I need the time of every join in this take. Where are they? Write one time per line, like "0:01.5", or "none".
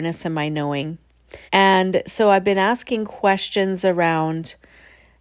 0:01.5